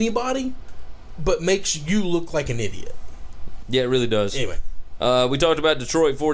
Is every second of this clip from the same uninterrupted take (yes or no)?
no